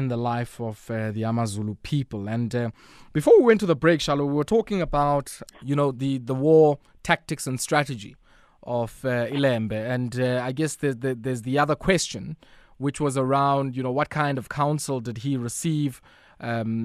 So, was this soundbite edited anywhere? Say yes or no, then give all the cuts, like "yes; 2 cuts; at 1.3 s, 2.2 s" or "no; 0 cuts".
yes; 1 cut; at 5.5 s